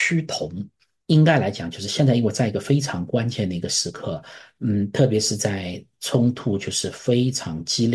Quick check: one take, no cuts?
no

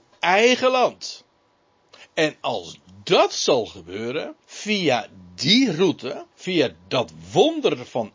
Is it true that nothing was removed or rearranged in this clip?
no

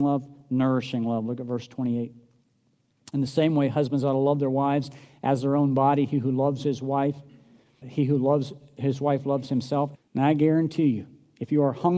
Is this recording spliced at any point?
yes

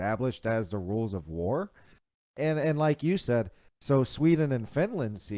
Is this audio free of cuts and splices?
yes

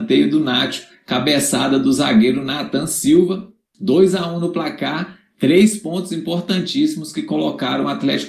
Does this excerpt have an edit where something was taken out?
no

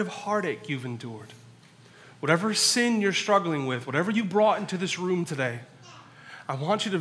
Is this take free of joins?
yes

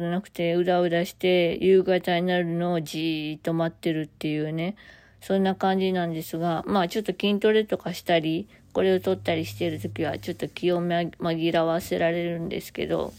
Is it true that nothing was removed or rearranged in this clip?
yes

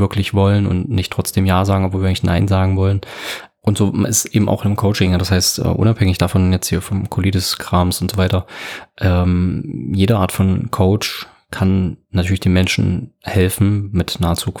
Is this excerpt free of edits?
yes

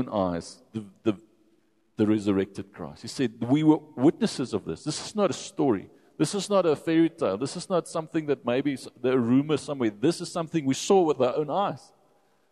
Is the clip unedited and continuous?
yes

